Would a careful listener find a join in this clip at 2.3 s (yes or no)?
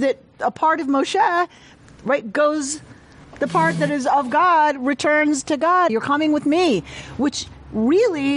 no